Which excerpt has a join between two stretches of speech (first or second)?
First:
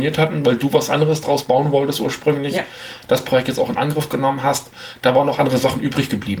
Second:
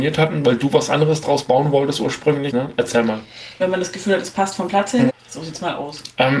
second